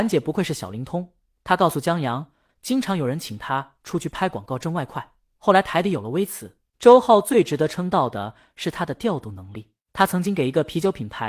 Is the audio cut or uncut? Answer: cut